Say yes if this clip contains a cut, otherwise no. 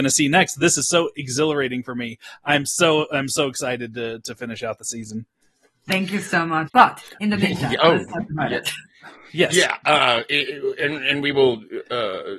yes